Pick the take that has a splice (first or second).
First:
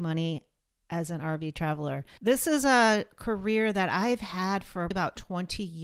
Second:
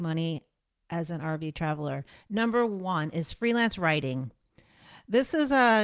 first